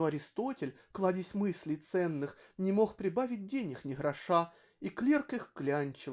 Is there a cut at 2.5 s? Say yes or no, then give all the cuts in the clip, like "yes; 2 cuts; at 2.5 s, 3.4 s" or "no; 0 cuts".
no; 0 cuts